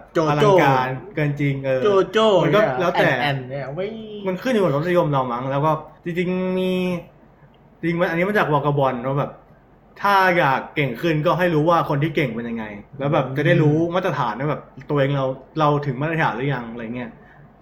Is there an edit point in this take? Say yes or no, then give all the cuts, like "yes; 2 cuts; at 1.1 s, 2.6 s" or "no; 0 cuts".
yes; 2 cuts; at 6.0 s, 12.9 s